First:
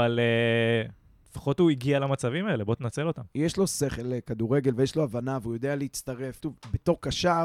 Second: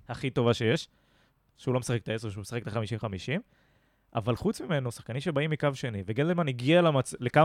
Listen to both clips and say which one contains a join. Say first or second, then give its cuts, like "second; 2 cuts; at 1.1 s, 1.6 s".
first; 1 cut; at 6.4 s